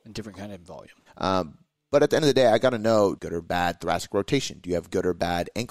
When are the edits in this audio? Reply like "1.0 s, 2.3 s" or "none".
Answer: 1.1 s, 3.2 s